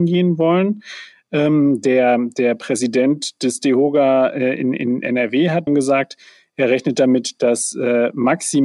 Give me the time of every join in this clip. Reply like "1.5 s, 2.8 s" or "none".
5.7 s